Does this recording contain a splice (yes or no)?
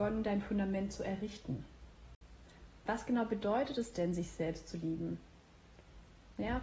no